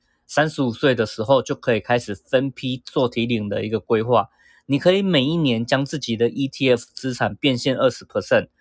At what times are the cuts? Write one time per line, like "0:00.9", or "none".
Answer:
none